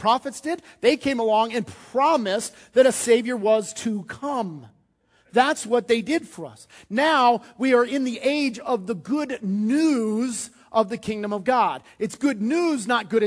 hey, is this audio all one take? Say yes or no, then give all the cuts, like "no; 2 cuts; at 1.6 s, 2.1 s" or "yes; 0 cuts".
yes; 0 cuts